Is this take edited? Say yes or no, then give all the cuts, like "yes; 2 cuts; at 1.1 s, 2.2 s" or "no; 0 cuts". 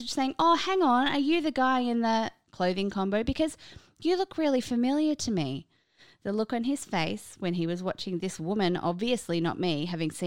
no; 0 cuts